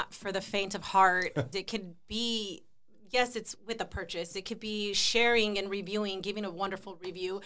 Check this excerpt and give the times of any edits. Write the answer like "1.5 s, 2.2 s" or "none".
1.5 s, 4.3 s